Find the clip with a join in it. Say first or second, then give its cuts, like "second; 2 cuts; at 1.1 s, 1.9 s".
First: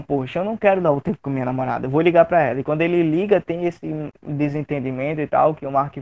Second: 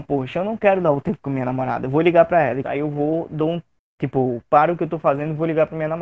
second; 1 cut; at 2.6 s